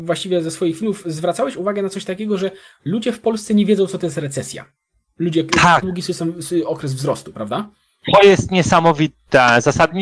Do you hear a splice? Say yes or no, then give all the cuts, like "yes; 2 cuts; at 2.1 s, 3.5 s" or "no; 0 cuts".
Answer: yes; 1 cut; at 5.8 s